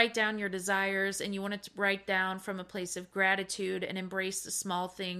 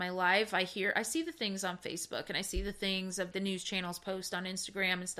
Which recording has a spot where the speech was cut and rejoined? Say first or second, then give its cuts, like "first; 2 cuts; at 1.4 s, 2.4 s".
second; 1 cut; at 3.3 s